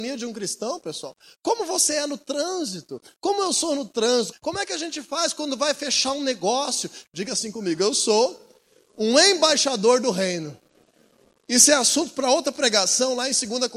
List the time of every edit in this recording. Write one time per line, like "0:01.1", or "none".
0:04.3
0:07.0